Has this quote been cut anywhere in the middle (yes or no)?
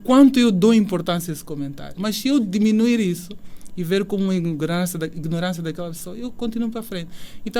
yes